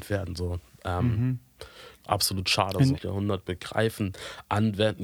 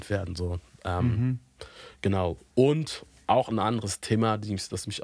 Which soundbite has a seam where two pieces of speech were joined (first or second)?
first